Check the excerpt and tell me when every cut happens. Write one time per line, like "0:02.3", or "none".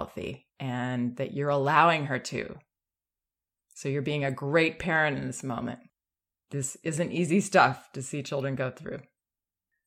none